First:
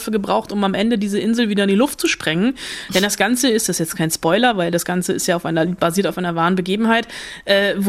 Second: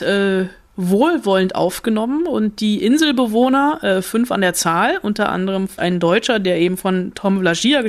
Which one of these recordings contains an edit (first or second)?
second